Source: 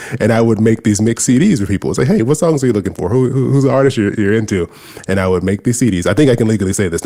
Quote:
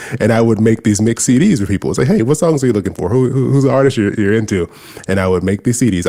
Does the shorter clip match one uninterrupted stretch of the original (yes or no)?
yes